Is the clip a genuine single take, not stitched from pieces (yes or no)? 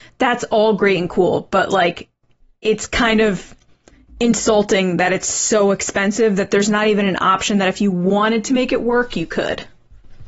yes